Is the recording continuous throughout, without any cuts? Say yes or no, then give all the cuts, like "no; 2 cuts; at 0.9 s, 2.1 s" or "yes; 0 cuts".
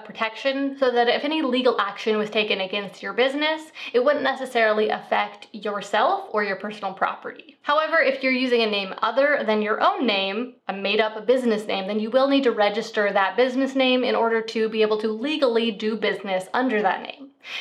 no; 1 cut; at 7.6 s